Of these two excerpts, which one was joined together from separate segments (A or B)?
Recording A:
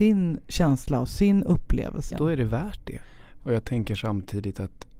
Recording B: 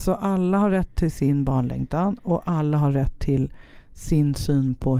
A